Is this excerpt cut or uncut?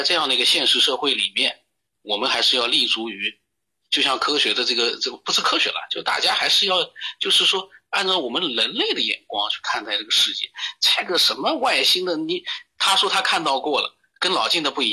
uncut